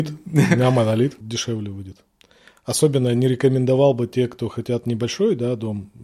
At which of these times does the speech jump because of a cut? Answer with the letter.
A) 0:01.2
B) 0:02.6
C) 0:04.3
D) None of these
A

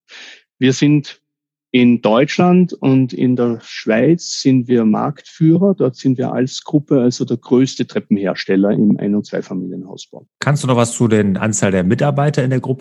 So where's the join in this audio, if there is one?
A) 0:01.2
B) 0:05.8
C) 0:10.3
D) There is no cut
C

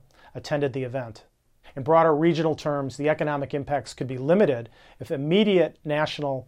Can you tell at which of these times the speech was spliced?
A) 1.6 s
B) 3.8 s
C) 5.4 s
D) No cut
A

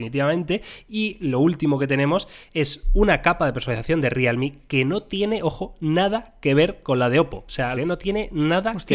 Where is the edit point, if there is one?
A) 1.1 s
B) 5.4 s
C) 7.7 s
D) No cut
C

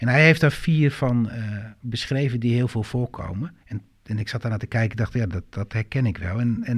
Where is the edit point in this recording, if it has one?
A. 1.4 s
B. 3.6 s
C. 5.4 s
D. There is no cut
B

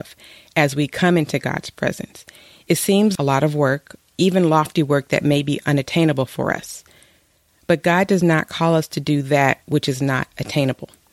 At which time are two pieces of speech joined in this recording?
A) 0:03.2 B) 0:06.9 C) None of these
A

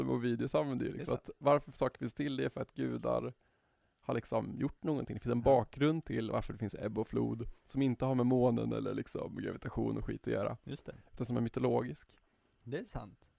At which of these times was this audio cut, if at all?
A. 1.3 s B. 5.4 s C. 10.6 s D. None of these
D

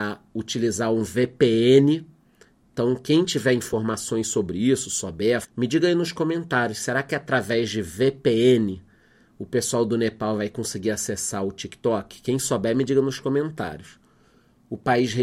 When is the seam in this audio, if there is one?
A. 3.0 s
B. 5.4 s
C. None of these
B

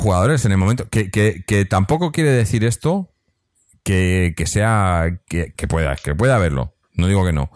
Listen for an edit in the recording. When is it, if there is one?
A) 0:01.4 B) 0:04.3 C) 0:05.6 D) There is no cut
C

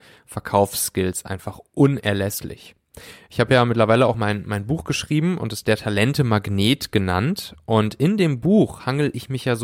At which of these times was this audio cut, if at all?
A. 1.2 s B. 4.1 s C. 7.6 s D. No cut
D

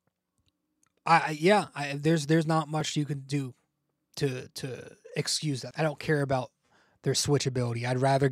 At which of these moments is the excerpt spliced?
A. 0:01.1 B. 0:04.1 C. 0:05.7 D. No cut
C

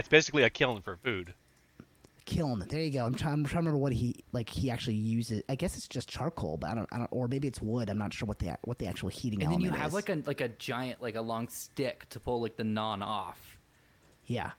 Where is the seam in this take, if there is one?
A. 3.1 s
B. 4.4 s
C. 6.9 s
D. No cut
A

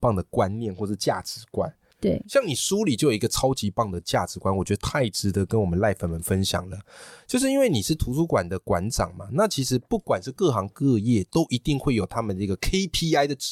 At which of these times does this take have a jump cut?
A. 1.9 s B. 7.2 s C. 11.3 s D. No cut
A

